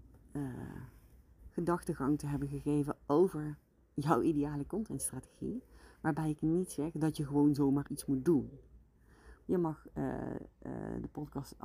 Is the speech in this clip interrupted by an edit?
yes; 2 cuts; at 7.9 s, 9.4 s

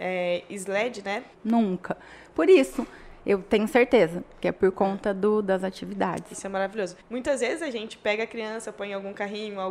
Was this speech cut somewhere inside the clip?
yes; 2 cuts; at 1.3 s, 7.0 s

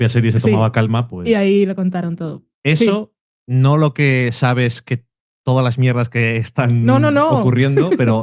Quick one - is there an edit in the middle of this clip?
yes; 1 cut; at 2.5 s

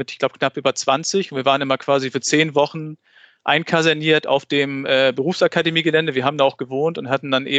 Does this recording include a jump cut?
no; 0 cuts

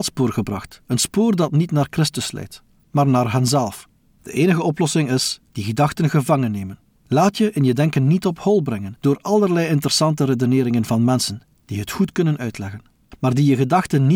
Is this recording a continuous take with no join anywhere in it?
no; 2 cuts; at 5.5 s, 6.9 s

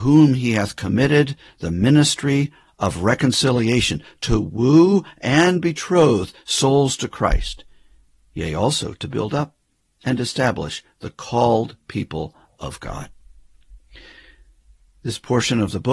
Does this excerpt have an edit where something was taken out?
no; 0 cuts

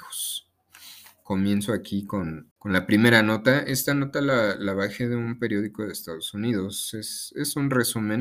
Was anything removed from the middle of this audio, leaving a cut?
no; 0 cuts

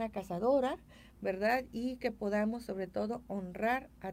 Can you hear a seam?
no; 0 cuts

